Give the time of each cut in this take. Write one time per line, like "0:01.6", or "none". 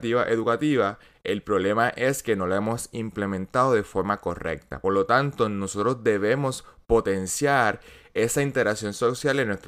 none